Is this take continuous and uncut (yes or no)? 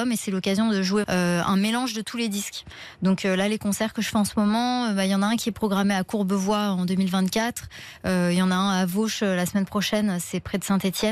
no